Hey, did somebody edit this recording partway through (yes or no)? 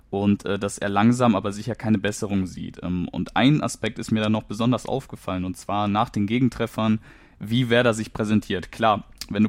no